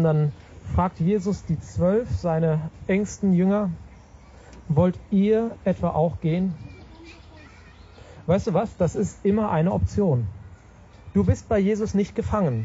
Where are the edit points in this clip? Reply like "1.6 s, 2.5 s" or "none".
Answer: none